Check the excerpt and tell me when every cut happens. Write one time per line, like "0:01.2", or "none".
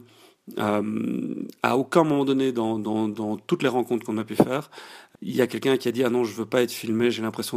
0:05.1